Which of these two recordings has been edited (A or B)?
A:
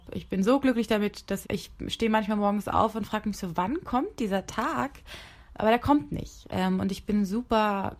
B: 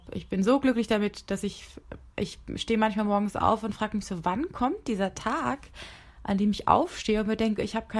A